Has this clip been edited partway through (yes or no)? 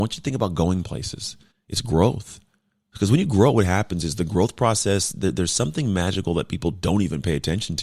yes